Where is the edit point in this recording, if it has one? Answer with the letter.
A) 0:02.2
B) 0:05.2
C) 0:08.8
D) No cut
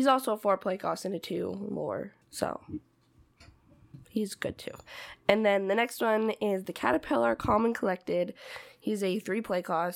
A